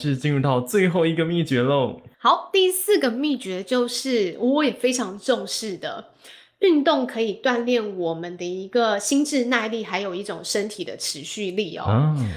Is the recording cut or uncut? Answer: cut